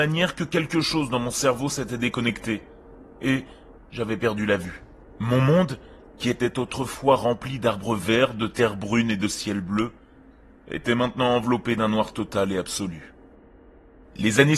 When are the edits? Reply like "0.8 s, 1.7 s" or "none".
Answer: 3.8 s